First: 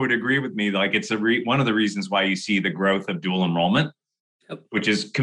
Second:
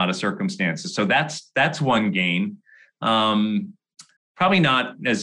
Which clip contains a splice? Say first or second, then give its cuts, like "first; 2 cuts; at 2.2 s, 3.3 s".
second; 1 cut; at 4.2 s